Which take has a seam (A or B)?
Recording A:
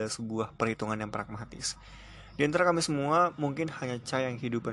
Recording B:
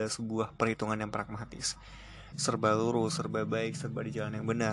B